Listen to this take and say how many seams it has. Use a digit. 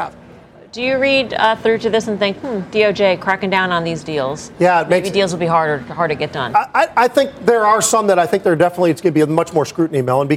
0